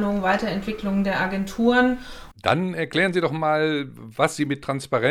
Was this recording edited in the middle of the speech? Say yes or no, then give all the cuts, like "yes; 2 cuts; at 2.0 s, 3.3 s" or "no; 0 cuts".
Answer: yes; 1 cut; at 2.3 s